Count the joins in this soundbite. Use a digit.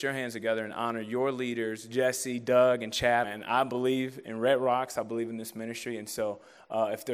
1